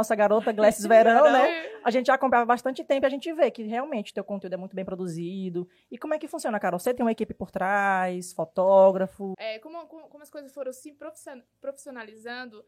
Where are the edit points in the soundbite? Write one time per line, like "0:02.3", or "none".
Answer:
0:09.3